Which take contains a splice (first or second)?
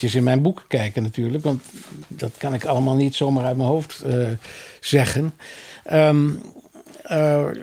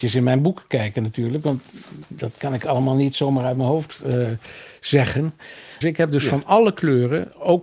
second